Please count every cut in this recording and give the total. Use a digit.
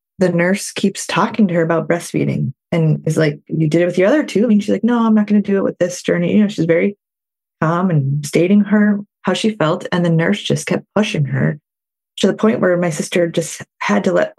1